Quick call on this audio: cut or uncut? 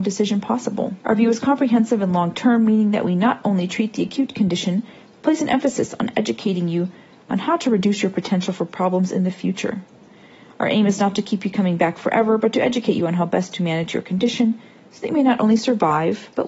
cut